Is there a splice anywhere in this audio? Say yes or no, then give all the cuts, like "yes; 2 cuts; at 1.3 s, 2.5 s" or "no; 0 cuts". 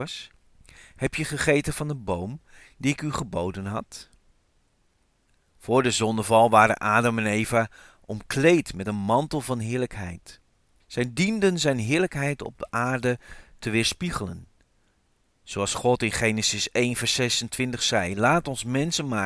no; 0 cuts